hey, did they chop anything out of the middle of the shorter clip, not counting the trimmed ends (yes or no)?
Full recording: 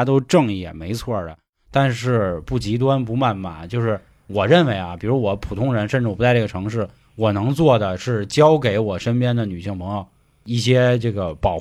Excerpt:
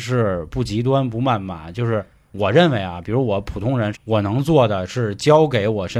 yes